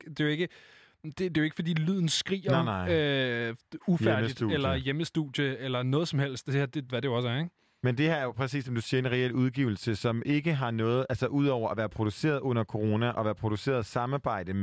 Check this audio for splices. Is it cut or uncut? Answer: cut